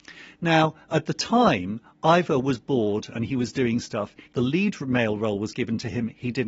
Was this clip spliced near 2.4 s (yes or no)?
no